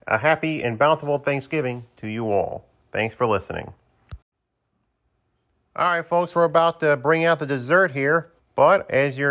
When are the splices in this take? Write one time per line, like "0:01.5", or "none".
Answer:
0:08.4